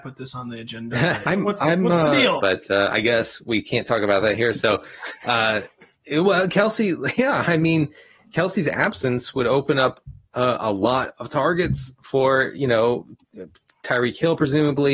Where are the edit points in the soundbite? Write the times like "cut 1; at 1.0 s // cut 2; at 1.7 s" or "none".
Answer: cut 1; at 1.2 s // cut 2; at 2.4 s